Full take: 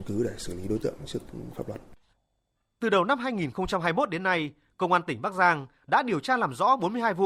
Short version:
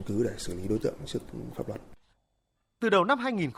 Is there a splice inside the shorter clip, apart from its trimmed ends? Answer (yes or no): no